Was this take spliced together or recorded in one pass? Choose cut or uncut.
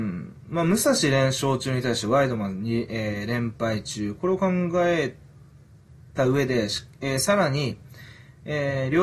uncut